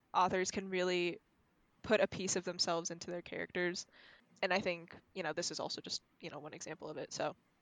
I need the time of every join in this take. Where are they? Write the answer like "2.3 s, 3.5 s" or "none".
none

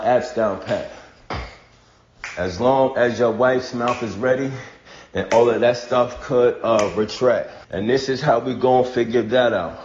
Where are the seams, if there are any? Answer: 7.6 s

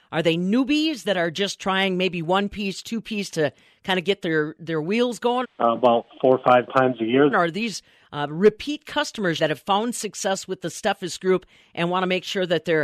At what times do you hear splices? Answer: 5.4 s, 7.3 s, 9.4 s

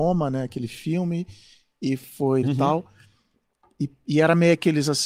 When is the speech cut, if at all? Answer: 2.4 s

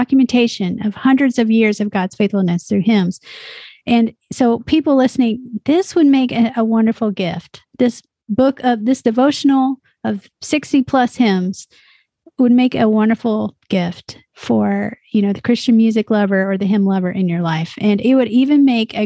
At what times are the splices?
none

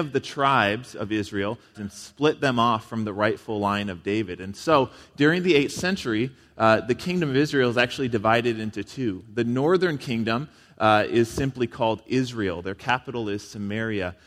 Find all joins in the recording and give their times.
1.7 s

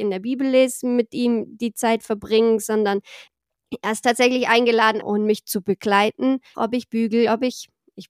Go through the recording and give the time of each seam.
5.0 s, 6.5 s

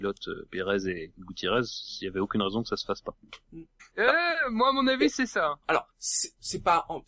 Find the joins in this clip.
3.8 s, 5.6 s

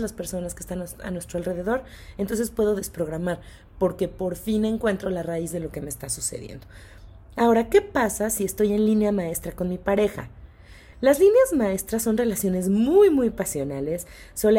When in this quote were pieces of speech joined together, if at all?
none

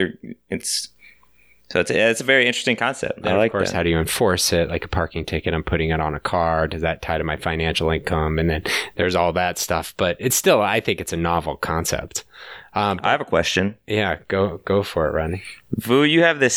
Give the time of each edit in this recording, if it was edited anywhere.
none

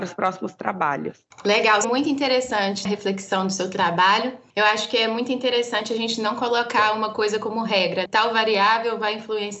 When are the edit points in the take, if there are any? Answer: 1.8 s

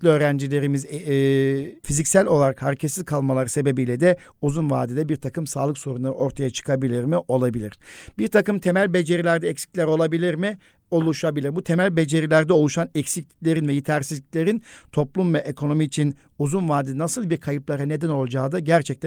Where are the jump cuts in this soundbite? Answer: 1.8 s

